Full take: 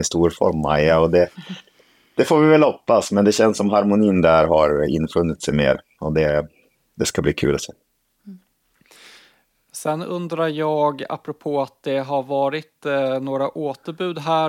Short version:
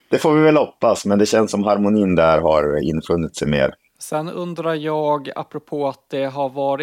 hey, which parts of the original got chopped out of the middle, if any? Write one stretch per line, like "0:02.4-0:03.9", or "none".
0:05.9-0:09.6